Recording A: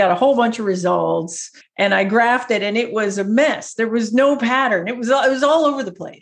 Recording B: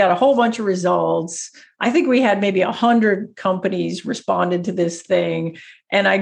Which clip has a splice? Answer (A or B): A